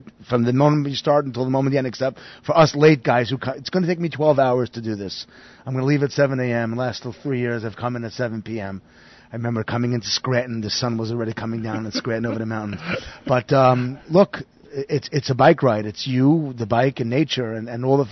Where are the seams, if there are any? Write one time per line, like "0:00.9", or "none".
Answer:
none